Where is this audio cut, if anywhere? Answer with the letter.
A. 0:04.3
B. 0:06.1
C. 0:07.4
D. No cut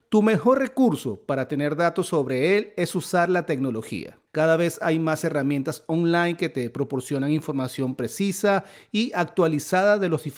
A